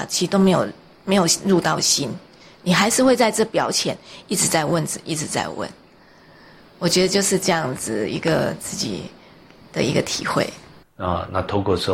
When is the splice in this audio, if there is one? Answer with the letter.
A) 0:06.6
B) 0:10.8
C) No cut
B